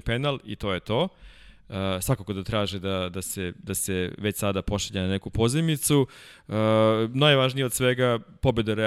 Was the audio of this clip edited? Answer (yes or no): no